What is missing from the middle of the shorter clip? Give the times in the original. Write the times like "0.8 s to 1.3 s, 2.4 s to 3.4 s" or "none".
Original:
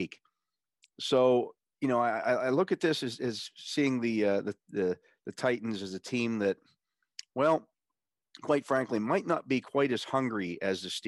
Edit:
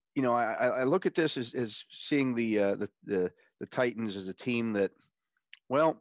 none